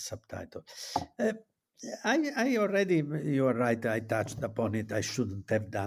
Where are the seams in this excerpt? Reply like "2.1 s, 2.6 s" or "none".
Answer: none